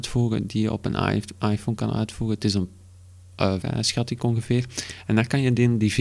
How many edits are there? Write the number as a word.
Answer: one